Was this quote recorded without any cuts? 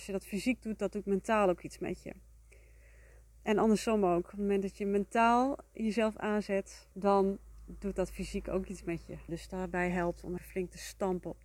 no; 3 cuts; at 6.9 s, 9.3 s, 10.4 s

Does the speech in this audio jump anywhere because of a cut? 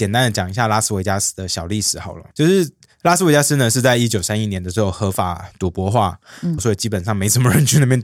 yes; 2 cuts; at 2.3 s, 6.6 s

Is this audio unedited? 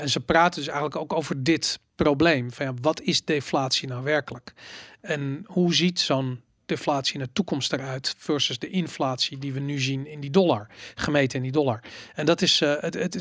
yes; 0 cuts

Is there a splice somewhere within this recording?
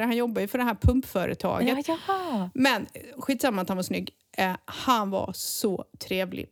no; 0 cuts

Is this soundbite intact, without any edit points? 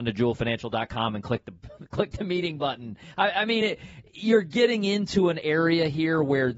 yes; 0 cuts

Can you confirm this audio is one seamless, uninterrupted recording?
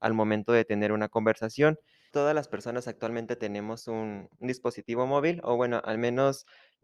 no; 1 cut; at 2.1 s

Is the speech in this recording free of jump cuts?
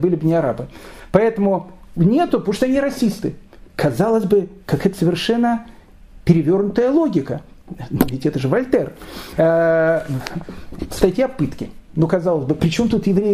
yes; 0 cuts

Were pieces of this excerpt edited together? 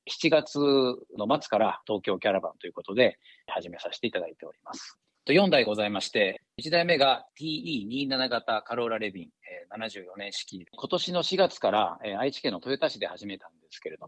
yes; 1 cut; at 10.7 s

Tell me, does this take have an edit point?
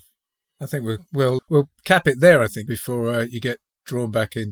yes; 2 cuts; at 1.4 s, 2.7 s

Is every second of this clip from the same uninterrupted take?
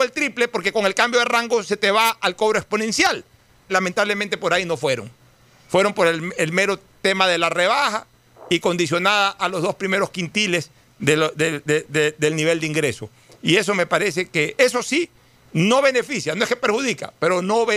no; 2 cuts; at 3.7 s, 14.6 s

